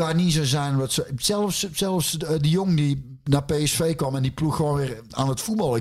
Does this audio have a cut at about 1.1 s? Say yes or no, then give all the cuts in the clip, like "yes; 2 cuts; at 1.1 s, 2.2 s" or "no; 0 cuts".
no; 0 cuts